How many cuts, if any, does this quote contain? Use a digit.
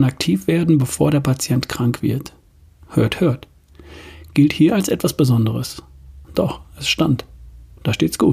1